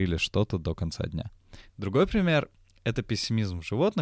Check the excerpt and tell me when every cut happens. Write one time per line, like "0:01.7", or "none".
0:01.7